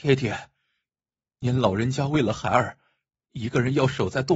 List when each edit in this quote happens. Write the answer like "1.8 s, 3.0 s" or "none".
none